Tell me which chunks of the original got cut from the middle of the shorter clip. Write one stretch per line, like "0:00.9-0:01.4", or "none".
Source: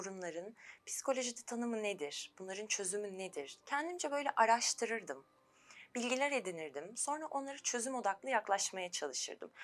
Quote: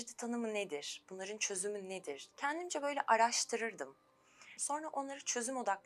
0:05.9-0:06.9